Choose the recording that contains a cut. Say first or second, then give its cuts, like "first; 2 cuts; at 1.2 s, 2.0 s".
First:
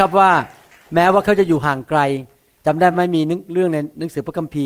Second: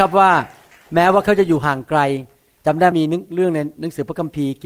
second; 1 cut; at 2.9 s